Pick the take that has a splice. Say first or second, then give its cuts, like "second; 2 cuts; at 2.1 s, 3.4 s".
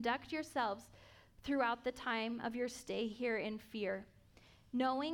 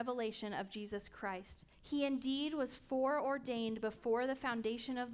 second; 1 cut; at 1.7 s